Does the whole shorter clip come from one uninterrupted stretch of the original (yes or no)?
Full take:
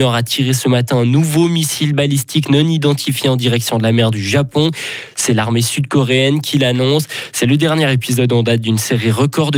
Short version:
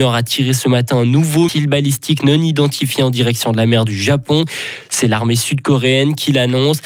no